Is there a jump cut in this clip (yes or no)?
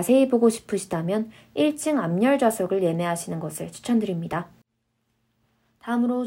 no